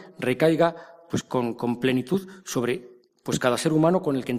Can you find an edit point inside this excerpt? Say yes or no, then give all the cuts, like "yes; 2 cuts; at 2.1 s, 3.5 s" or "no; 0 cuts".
no; 0 cuts